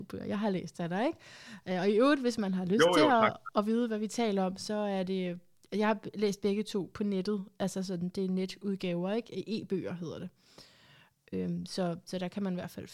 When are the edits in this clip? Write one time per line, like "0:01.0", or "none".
none

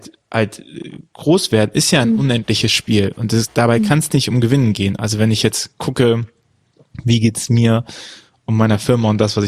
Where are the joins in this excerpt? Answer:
none

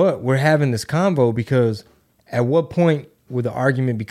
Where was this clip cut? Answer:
none

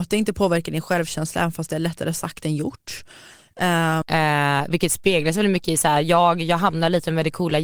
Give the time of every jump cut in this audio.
0:04.0

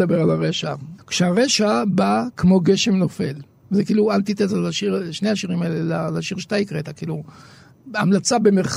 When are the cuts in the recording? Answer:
0:01.0

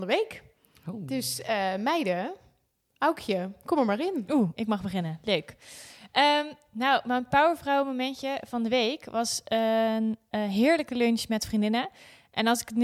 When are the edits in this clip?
none

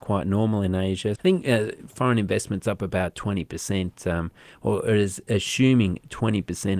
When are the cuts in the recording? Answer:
0:01.2

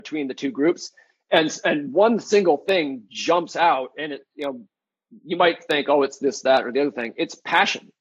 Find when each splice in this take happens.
none

